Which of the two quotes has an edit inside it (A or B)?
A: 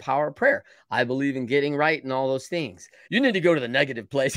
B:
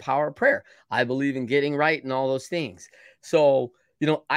A